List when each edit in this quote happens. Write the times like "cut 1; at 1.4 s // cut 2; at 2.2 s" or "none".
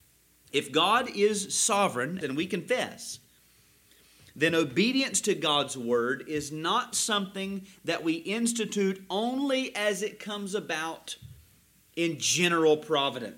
cut 1; at 2.2 s